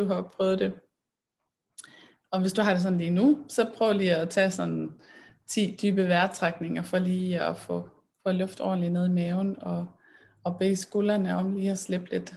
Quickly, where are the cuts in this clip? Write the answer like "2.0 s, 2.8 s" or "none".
none